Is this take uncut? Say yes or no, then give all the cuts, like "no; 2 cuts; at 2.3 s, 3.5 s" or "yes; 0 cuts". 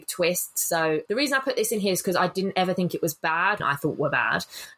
no; 2 cuts; at 1.1 s, 3.6 s